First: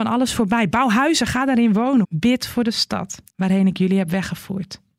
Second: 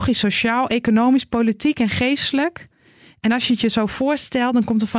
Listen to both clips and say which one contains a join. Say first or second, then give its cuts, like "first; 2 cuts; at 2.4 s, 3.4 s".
first; 2 cuts; at 2.0 s, 3.3 s